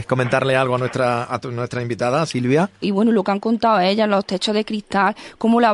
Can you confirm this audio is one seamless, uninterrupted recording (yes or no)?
no